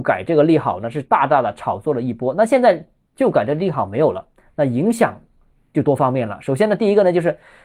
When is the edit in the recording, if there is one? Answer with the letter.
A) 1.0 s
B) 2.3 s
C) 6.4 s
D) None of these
D